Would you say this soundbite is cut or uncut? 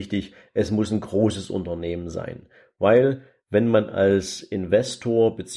uncut